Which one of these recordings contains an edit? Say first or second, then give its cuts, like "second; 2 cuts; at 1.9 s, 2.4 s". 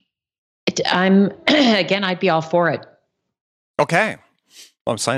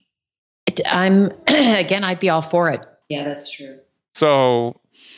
second; 1 cut; at 3.0 s